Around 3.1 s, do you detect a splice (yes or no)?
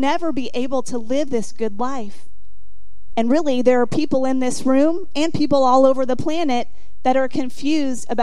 yes